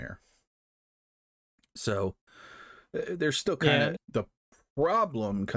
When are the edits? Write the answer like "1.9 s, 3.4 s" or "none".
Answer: 4.0 s